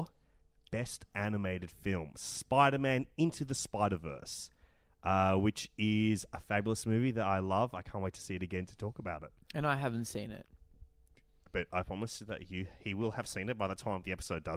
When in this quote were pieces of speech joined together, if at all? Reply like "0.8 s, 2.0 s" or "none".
none